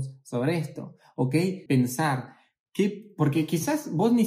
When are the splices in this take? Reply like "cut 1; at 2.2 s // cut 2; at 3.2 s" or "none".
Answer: cut 1; at 1.7 s